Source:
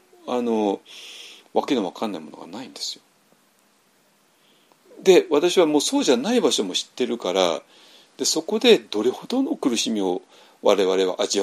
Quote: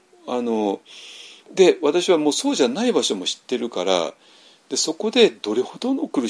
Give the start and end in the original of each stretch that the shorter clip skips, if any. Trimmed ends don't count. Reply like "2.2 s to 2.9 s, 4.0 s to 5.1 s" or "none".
1.5 s to 4.9 s